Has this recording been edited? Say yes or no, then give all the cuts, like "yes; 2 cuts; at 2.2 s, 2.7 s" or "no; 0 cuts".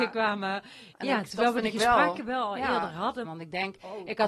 yes; 2 cuts; at 0.9 s, 3.2 s